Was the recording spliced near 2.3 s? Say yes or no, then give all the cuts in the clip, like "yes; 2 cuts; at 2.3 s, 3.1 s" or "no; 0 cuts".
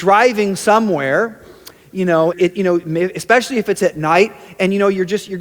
yes; 1 cut; at 2.3 s